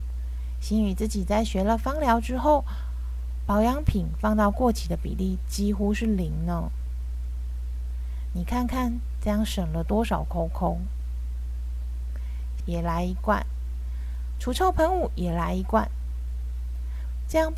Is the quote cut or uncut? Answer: cut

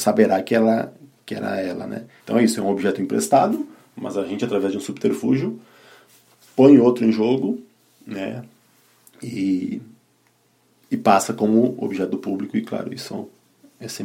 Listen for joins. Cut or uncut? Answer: cut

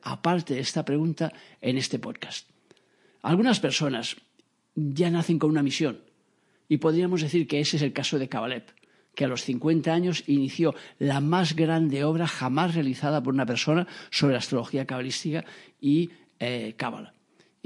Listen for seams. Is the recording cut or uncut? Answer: uncut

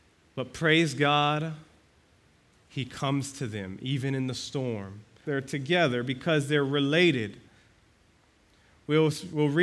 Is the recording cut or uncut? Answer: cut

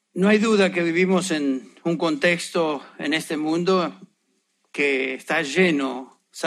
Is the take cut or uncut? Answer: uncut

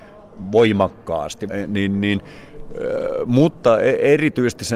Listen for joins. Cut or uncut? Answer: cut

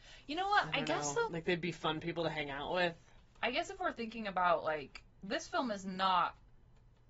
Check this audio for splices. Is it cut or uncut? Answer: cut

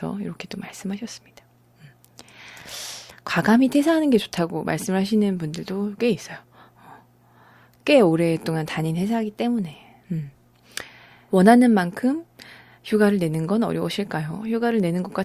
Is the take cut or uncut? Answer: cut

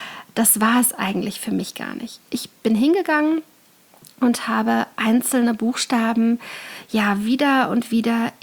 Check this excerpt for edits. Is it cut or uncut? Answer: uncut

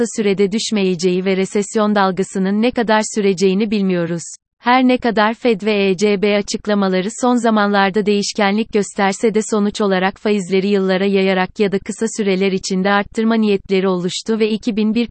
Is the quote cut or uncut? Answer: cut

